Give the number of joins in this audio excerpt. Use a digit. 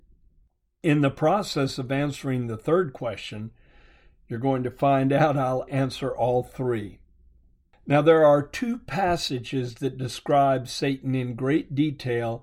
1